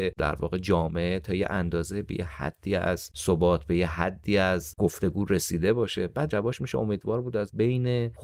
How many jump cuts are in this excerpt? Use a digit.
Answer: 1